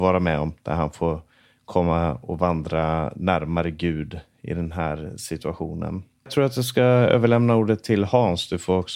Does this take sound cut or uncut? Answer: uncut